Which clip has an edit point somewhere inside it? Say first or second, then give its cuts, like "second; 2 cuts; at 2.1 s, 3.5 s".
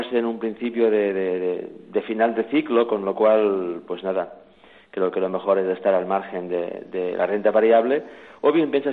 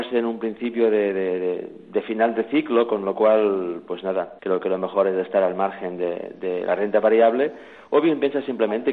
second; 1 cut; at 4.4 s